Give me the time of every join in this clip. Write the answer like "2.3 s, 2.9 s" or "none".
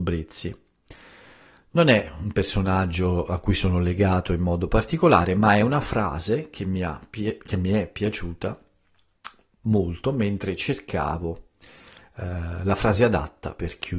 none

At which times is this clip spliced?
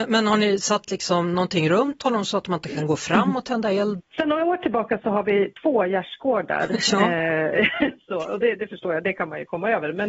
4.0 s

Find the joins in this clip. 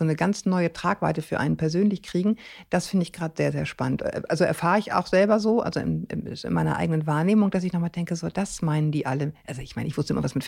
none

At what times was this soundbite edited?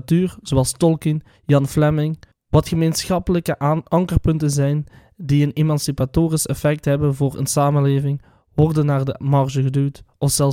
2.3 s

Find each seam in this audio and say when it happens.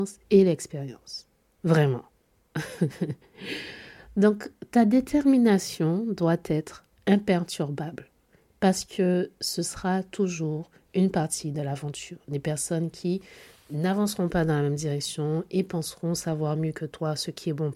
none

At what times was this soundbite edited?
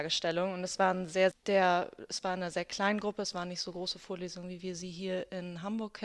1.3 s

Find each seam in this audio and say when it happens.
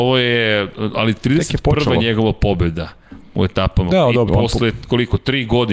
4.3 s

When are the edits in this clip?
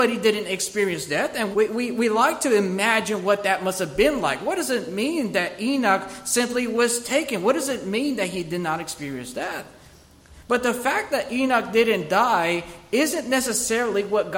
1.5 s

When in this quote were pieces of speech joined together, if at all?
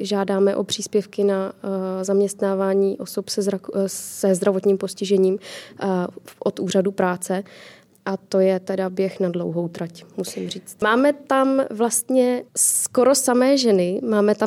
10.8 s, 12.5 s

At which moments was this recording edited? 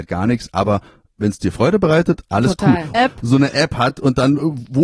2.9 s

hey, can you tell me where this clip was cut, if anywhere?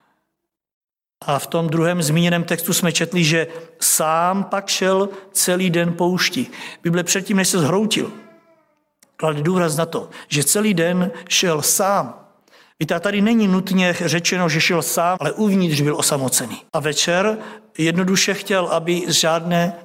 15.2 s, 16.7 s

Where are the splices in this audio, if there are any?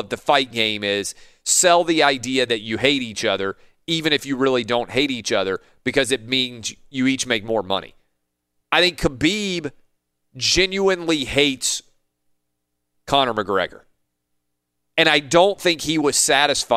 8.6 s

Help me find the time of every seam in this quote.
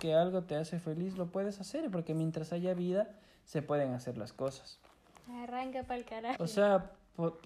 5.2 s, 6.3 s

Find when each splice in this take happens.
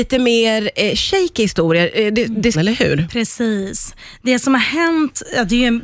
2.5 s

